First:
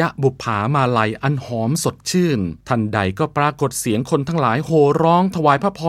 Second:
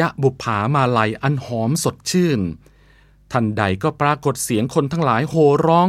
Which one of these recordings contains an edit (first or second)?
first